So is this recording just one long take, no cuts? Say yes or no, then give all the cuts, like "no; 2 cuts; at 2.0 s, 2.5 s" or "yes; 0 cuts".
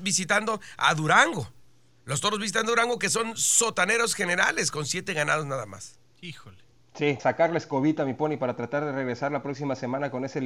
no; 1 cut; at 7.2 s